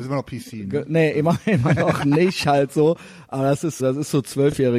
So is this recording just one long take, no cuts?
no; 1 cut; at 3.8 s

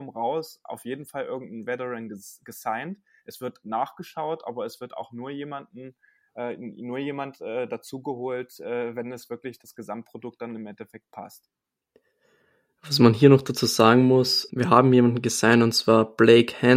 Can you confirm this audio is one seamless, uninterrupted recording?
no; 1 cut; at 14.5 s

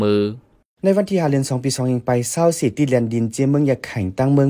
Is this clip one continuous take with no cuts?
yes; 0 cuts

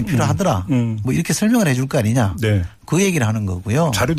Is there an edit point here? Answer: no; 0 cuts

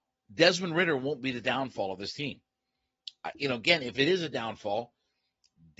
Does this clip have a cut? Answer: no; 0 cuts

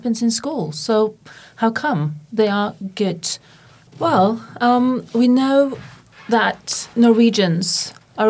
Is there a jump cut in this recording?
yes; 2 cuts; at 3.9 s, 6.9 s

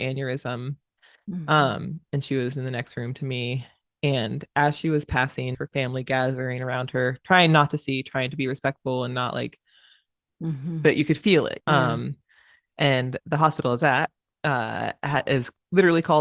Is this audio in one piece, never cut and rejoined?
no; 2 cuts; at 5.5 s, 11.6 s

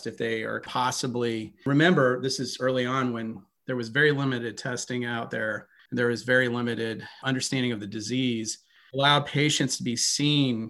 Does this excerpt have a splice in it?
no; 0 cuts

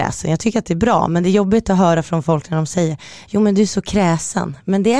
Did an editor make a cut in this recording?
no; 0 cuts

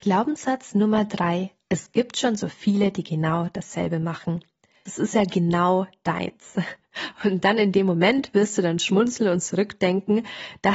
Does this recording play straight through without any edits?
no; 1 cut; at 4.9 s

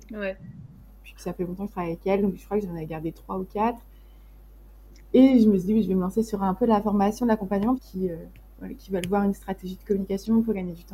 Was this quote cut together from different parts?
yes; 1 cut; at 7.7 s

